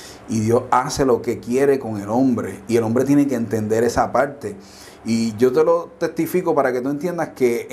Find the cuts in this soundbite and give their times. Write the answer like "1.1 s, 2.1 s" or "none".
none